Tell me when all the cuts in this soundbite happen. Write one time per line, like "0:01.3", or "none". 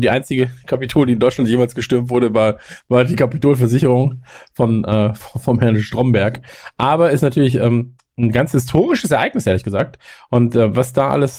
none